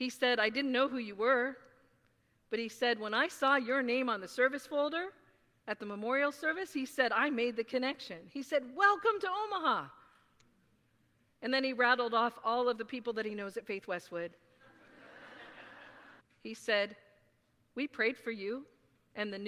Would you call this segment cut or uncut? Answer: cut